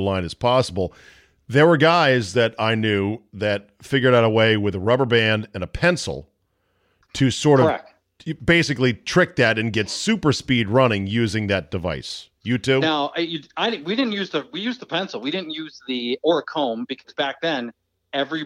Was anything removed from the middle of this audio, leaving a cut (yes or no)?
no